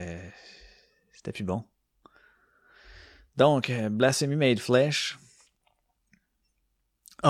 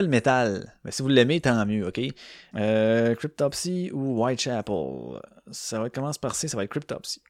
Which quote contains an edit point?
second; 1 cut; at 2.5 s

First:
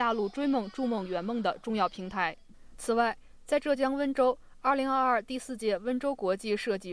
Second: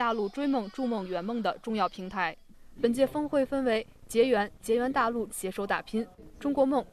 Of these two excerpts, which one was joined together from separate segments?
second; 2 cuts; at 2.7 s, 5.3 s

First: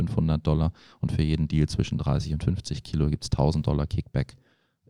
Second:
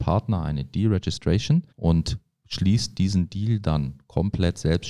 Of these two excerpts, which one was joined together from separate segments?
second; 1 cut; at 1.7 s

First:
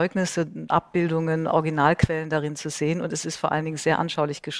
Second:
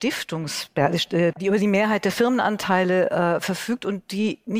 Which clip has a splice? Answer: second; 1 cut; at 1.3 s

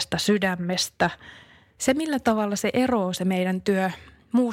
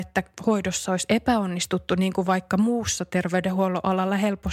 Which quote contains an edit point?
first; 1 cut; at 1.8 s

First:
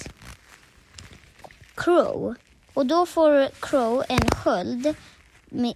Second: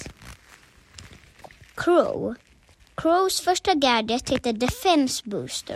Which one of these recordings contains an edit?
first; 1 cut; at 2.7 s

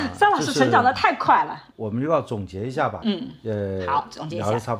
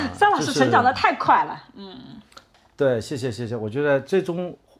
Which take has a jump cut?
first; 2 cuts; at 1.7 s, 3.0 s

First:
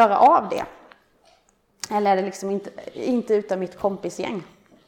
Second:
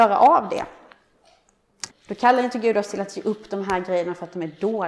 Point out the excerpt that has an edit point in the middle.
second; 1 cut; at 1.9 s

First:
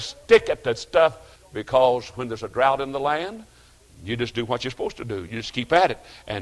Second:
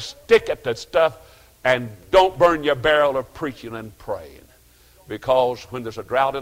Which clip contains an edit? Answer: first; 1 cut; at 1.4 s

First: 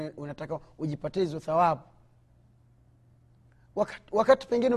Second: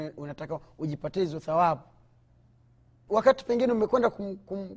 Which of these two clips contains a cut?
second; 1 cut; at 3.1 s

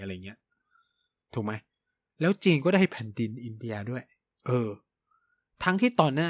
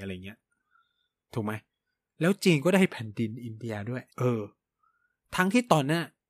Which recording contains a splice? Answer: second; 1 cut; at 4.1 s

